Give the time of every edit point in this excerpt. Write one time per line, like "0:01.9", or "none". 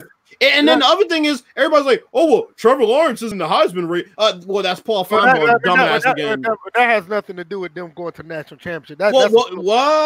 0:03.3